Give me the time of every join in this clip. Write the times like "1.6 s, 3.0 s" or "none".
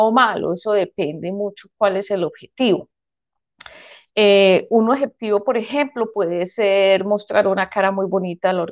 none